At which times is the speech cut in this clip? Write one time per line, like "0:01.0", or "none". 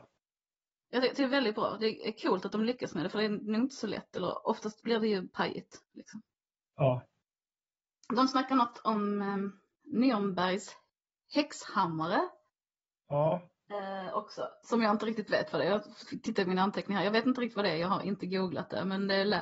none